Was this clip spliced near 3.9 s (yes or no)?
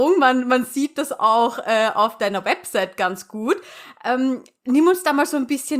no